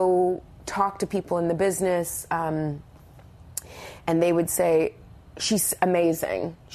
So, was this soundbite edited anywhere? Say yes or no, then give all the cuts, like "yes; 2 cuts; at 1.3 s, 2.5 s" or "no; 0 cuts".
no; 0 cuts